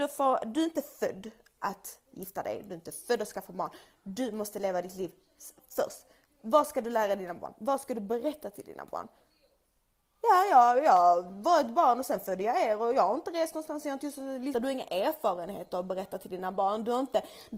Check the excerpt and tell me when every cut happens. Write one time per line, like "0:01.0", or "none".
0:14.5